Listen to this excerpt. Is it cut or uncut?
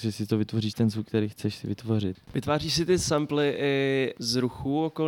cut